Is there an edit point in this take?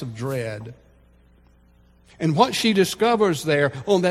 no; 0 cuts

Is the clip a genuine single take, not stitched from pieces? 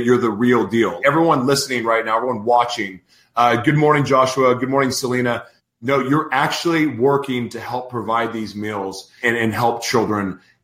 no; 3 cuts; at 1.0 s, 5.6 s, 9.2 s

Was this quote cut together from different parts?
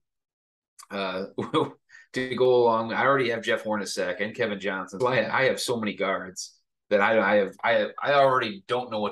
yes; 1 cut; at 5.0 s

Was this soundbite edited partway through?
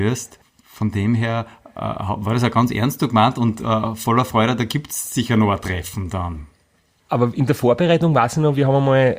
no; 0 cuts

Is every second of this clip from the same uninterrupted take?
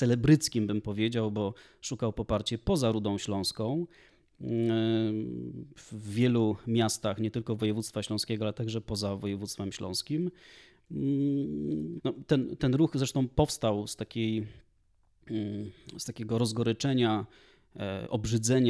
no; 1 cut; at 12.0 s

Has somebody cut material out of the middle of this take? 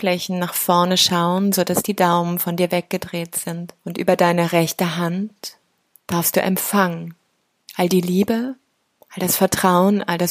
yes; 1 cut; at 3.8 s

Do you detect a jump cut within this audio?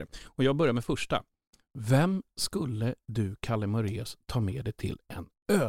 no; 0 cuts

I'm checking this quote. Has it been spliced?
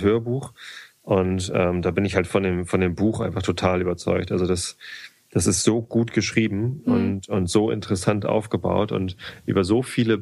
no; 0 cuts

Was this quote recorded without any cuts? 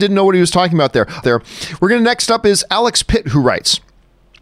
no; 1 cut; at 1.2 s

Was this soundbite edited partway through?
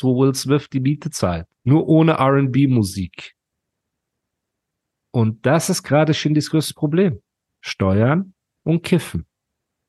yes; 1 cut; at 1.5 s

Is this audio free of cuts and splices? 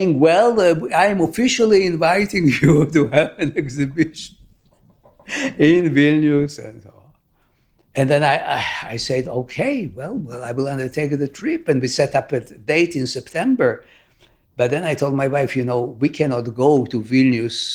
yes; 0 cuts

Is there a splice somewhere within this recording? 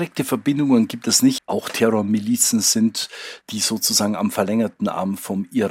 yes; 2 cuts; at 1.4 s, 3.4 s

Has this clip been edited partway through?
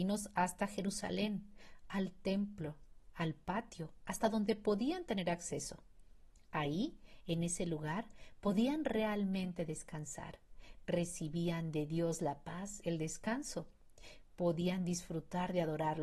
no; 0 cuts

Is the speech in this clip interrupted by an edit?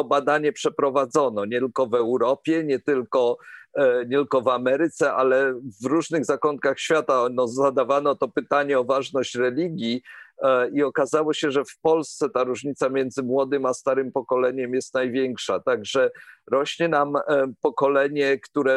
no; 0 cuts

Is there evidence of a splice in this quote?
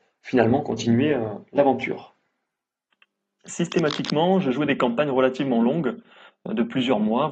yes; 1 cut; at 3.4 s

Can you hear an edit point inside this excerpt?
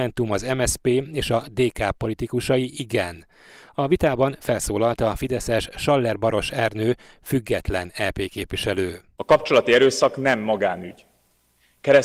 no; 0 cuts

